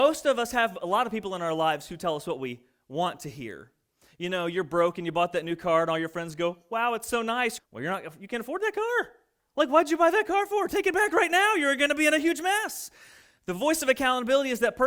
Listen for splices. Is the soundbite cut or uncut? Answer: cut